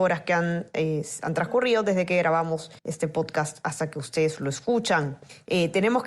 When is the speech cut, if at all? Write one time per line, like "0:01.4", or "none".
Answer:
0:02.8